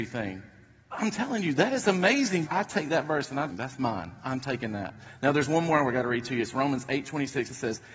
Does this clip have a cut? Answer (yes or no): yes